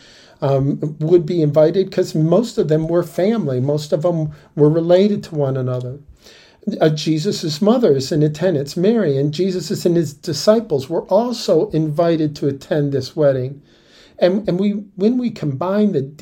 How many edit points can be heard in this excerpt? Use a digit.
0